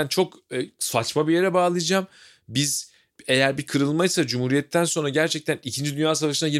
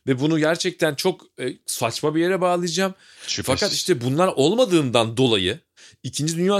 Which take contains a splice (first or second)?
second